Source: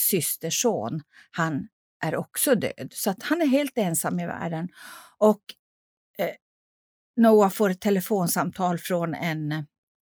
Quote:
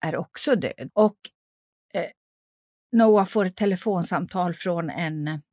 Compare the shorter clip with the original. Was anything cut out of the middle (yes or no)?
yes